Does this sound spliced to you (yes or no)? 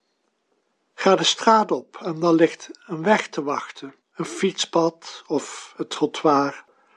yes